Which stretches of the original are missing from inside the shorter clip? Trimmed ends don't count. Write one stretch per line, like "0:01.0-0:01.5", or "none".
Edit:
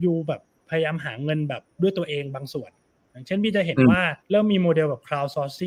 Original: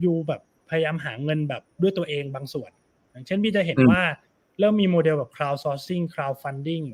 0:04.2-0:04.5